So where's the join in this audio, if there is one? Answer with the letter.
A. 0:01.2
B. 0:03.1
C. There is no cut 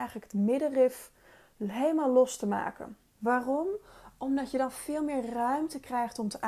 B